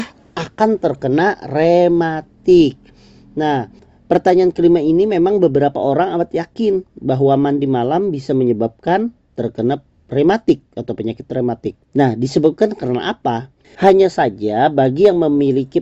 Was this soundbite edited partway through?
yes; 2 cuts; at 11.9 s, 13.6 s

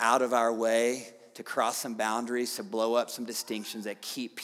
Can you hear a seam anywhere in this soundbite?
no; 0 cuts

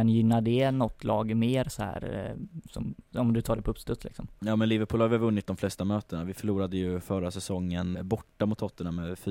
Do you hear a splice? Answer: yes; 1 cut; at 7.9 s

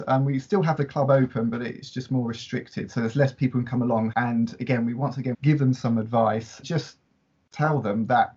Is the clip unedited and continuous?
no; 3 cuts; at 4.1 s, 5.3 s, 6.6 s

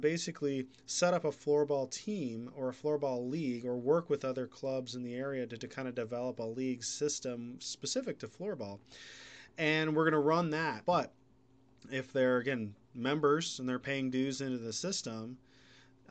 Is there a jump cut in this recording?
yes; 2 cuts; at 10.8 s, 12.8 s

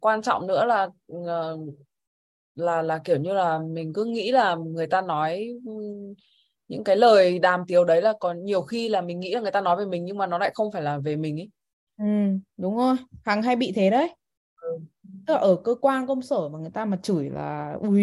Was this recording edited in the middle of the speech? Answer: no; 0 cuts

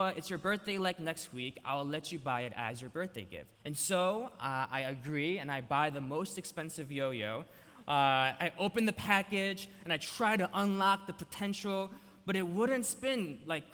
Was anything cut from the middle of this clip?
yes; 1 cut; at 3.6 s

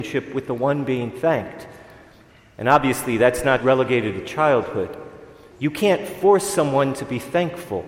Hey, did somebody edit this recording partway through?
yes; 2 cuts; at 3.6 s, 5.5 s

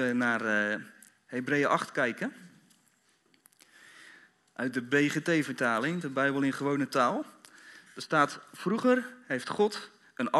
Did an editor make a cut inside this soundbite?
no; 0 cuts

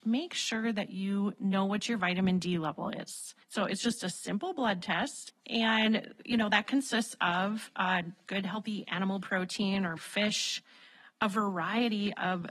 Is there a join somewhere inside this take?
yes; 3 cuts; at 3.4 s, 5.3 s, 10.0 s

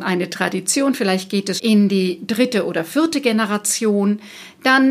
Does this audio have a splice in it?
yes; 1 cut; at 1.6 s

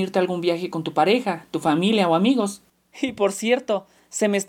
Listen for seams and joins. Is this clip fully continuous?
no; 1 cut; at 2.9 s

